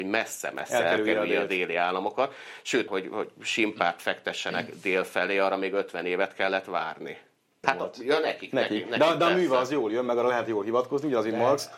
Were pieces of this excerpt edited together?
yes; 2 cuts; at 2.9 s, 7.6 s

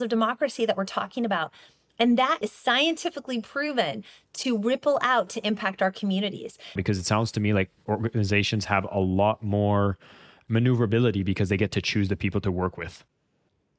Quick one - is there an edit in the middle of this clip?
yes; 2 cuts; at 2.4 s, 6.8 s

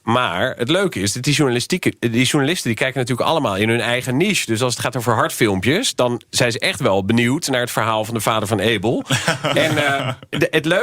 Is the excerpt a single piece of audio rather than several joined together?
yes; 0 cuts

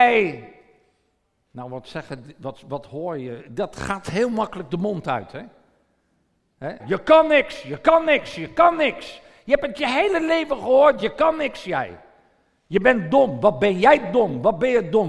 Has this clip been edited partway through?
yes; 1 cut; at 6.8 s

